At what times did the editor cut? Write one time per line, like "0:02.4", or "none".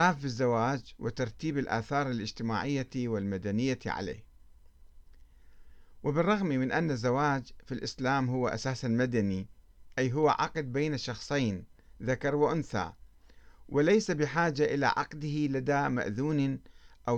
none